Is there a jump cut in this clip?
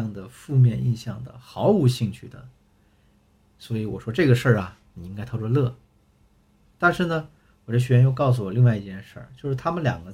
no; 0 cuts

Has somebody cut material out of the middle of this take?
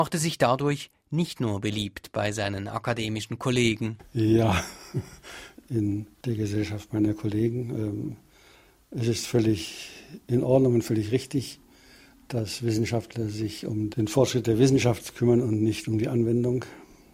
yes; 1 cut; at 5.5 s

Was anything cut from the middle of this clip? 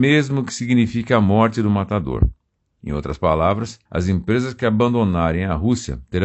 yes; 2 cuts; at 2.7 s, 3.8 s

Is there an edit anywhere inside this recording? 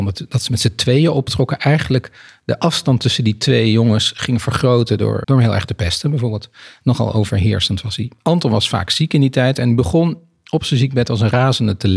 yes; 1 cut; at 5.2 s

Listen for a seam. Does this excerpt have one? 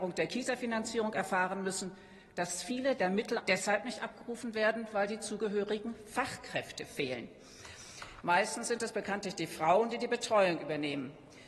yes; 2 cuts; at 3.4 s, 8.2 s

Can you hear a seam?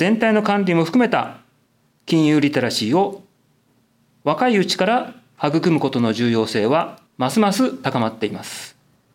yes; 1 cut; at 7.1 s

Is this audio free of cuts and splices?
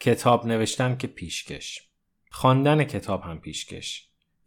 yes; 0 cuts

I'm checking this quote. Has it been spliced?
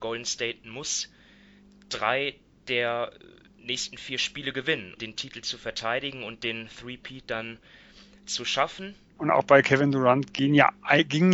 yes; 2 cuts; at 5.0 s, 9.2 s

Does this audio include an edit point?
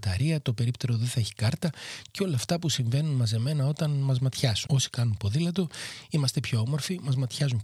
yes; 1 cut; at 4.7 s

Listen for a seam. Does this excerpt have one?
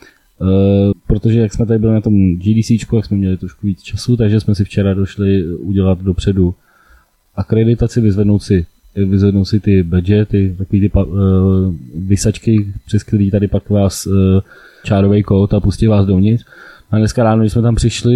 yes; 2 cuts; at 0.9 s, 14.8 s

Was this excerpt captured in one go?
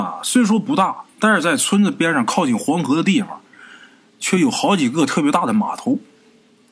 yes; 0 cuts

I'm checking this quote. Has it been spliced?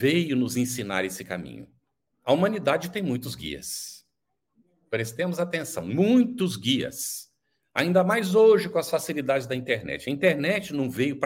yes; 1 cut; at 2.1 s

